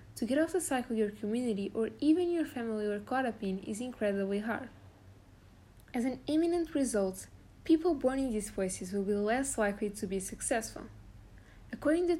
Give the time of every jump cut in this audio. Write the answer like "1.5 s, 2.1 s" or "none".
5.9 s